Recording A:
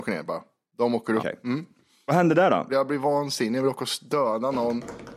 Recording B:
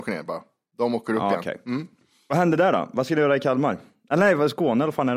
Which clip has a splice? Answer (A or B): A